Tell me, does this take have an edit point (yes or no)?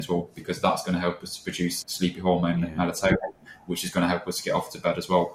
yes